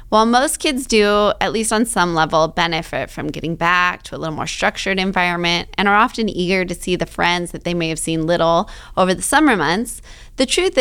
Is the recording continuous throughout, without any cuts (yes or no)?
yes